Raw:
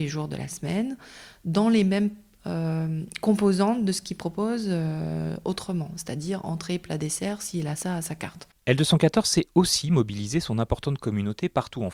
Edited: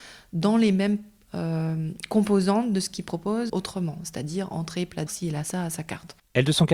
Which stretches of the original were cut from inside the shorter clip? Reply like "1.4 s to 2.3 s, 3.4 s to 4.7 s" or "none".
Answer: 4.6 s to 5.4 s, 7.0 s to 7.4 s